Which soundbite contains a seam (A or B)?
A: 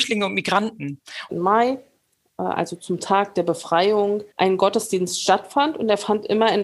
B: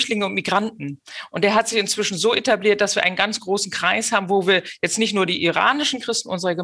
A